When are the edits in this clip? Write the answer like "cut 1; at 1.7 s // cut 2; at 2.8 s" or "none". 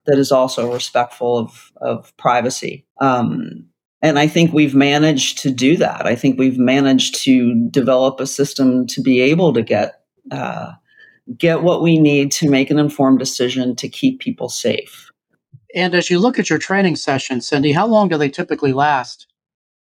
cut 1; at 2.9 s